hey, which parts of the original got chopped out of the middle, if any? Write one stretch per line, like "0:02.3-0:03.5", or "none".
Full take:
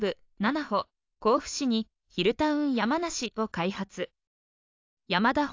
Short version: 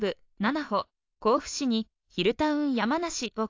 none